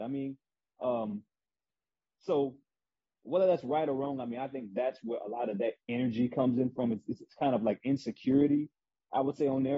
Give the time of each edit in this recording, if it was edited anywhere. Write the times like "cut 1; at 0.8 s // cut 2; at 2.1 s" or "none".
none